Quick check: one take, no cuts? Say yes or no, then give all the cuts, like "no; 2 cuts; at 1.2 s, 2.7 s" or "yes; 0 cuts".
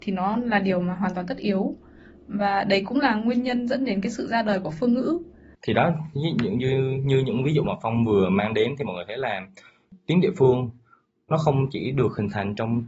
yes; 0 cuts